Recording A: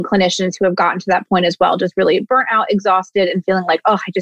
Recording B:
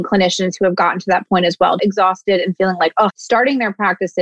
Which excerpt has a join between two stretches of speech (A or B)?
B